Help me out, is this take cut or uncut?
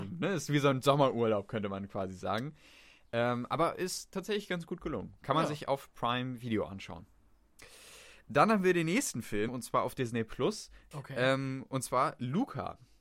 cut